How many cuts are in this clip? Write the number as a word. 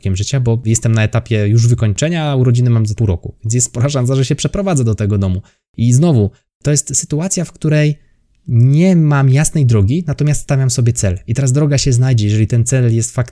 zero